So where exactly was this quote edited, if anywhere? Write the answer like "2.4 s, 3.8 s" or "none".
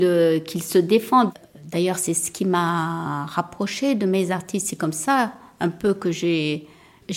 none